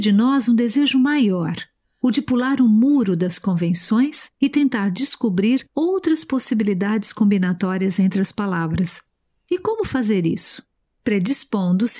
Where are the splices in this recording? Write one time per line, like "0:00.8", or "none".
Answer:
none